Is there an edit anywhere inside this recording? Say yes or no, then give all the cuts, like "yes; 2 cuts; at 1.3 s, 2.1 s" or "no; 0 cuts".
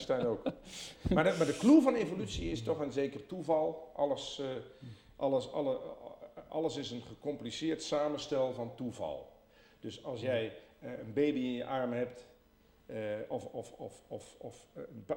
no; 0 cuts